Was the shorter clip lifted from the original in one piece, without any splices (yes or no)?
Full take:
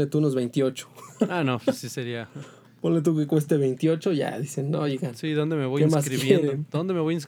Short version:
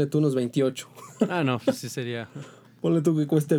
yes